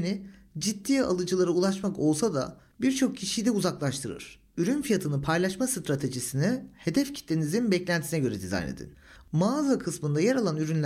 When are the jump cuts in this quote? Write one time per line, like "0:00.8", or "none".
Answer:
0:04.5